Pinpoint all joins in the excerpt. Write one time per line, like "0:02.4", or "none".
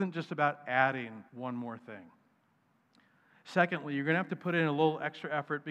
0:01.3